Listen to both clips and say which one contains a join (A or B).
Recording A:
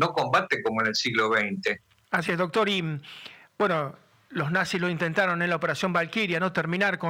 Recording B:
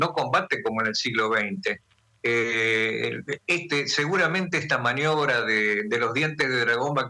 A